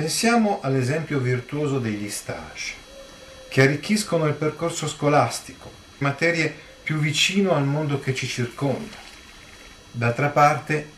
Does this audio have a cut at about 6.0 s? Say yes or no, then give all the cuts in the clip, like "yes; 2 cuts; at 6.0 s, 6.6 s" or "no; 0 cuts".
yes; 2 cuts; at 6.0 s, 9.8 s